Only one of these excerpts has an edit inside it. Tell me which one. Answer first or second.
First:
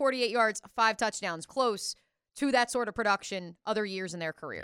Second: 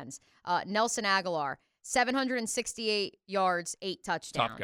first